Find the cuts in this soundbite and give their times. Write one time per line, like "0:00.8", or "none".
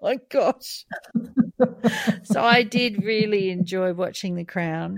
none

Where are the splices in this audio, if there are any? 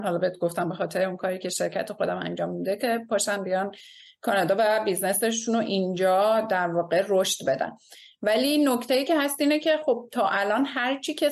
none

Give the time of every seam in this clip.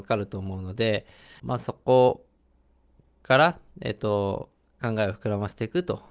0:01.4

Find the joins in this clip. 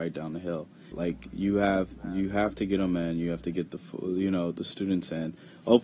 0:00.9

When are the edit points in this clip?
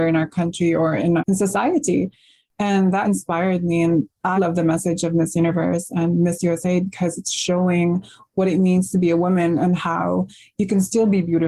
0:01.2
0:03.0
0:04.4

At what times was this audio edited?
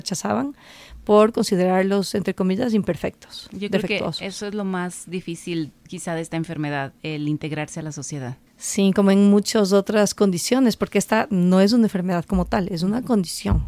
0:08.5

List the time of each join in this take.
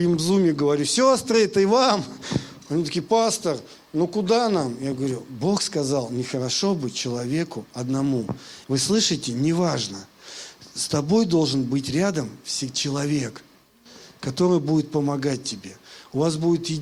0:08.6

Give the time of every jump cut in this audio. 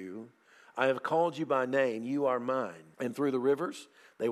0:02.9

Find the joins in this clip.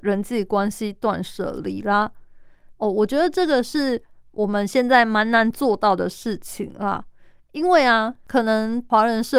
0:02.7

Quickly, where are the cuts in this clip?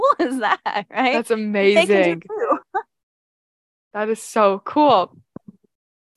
none

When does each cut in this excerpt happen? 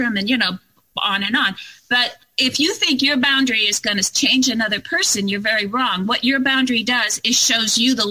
none

